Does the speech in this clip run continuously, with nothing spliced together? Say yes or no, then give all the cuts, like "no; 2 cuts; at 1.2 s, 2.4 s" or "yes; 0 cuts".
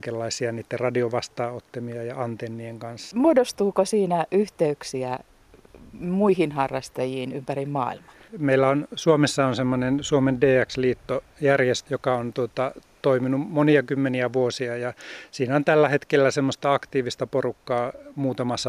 no; 3 cuts; at 3.1 s, 8.3 s, 11.9 s